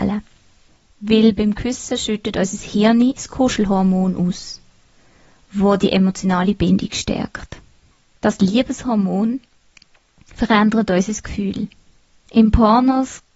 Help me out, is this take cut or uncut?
uncut